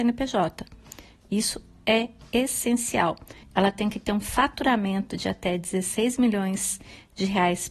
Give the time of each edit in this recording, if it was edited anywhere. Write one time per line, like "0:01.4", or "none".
0:03.4